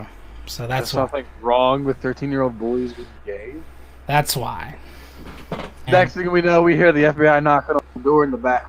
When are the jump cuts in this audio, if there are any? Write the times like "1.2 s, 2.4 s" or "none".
4.1 s, 5.9 s

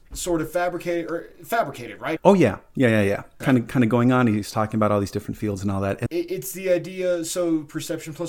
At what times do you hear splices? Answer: 2.2 s, 3.4 s, 6.1 s

